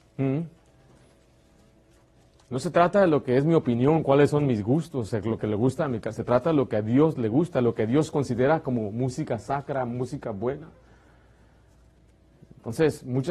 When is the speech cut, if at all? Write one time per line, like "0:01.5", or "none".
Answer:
none